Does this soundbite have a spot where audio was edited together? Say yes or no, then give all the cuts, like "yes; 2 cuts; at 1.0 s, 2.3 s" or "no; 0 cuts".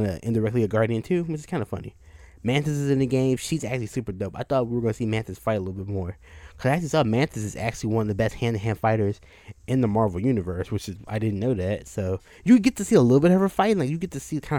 no; 0 cuts